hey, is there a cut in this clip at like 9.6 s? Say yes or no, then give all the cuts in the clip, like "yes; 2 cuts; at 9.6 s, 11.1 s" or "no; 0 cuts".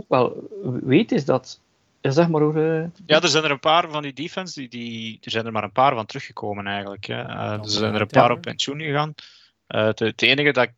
no; 0 cuts